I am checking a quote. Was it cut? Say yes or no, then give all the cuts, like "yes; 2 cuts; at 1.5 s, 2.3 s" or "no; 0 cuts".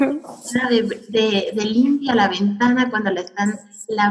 no; 0 cuts